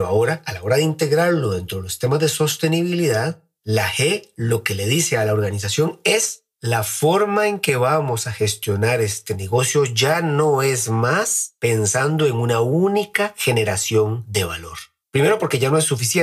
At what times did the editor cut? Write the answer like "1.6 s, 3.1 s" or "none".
15.0 s